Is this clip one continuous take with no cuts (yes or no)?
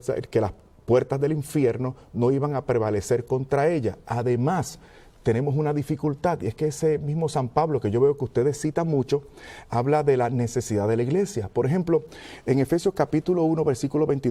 yes